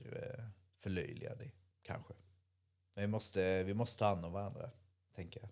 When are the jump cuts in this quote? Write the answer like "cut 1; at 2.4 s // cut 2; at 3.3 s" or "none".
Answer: none